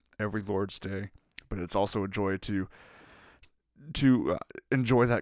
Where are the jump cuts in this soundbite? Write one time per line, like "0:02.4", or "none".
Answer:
none